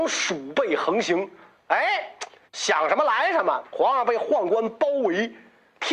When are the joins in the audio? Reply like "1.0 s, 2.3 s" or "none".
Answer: 2.5 s, 3.6 s